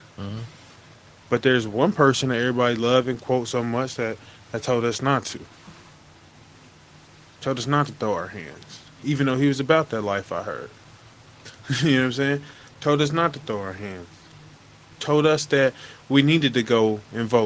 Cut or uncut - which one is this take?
cut